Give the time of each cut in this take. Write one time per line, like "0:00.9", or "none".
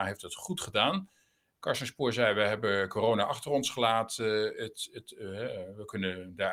none